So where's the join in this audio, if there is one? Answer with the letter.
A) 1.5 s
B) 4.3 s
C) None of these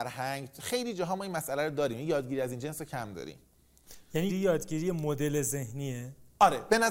B